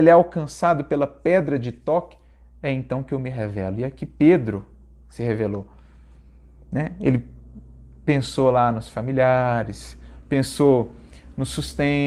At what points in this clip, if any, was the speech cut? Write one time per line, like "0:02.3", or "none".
none